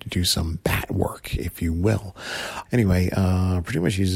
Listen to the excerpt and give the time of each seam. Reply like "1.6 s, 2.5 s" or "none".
2.7 s